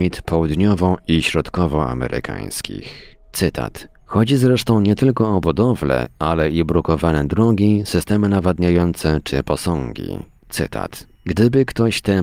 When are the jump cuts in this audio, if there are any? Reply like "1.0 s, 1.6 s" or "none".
4.0 s, 10.4 s